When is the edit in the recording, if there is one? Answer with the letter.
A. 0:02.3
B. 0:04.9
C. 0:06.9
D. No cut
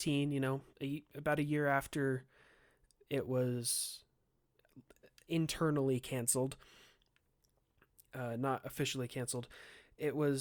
D